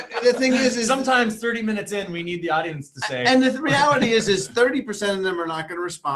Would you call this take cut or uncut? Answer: uncut